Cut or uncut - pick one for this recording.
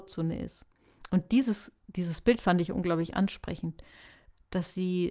uncut